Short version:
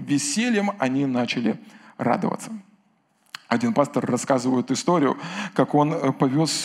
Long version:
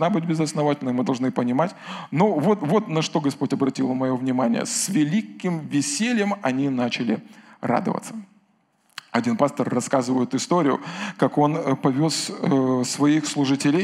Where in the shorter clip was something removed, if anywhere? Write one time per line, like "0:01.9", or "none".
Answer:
none